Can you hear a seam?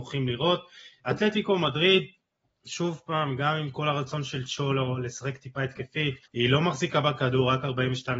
yes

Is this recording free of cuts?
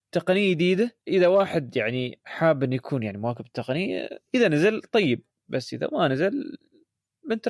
no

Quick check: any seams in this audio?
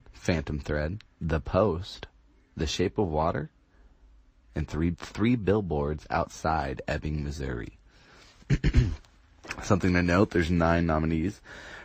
yes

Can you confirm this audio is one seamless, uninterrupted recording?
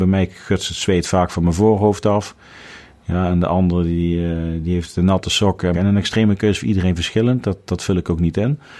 no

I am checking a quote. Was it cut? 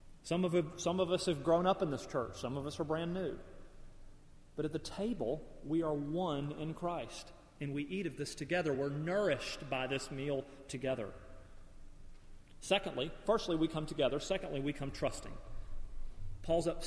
no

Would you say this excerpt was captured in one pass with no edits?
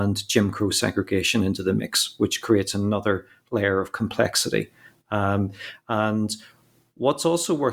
yes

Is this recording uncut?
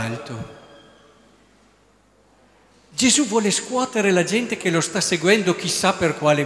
yes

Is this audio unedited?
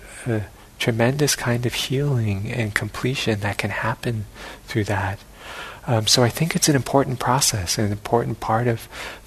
yes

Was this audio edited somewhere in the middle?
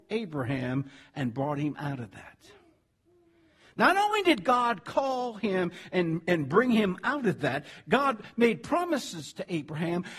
no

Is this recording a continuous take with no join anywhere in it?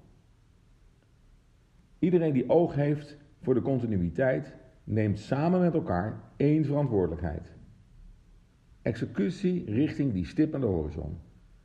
no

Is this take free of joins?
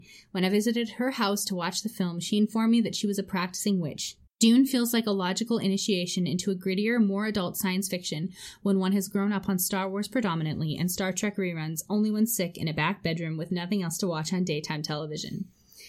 no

